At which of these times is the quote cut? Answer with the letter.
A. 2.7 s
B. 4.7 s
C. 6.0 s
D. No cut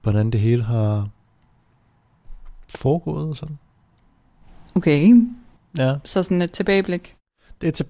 D